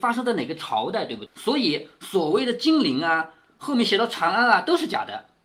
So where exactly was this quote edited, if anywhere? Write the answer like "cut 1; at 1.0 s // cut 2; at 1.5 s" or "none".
cut 1; at 1.3 s